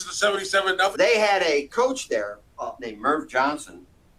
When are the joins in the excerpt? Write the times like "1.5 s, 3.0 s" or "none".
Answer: 0.9 s, 2.8 s